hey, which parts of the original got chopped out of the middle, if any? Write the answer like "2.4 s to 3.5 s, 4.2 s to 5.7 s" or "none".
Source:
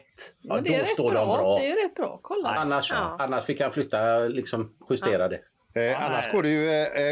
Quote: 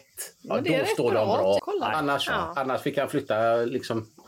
1.6 s to 2.2 s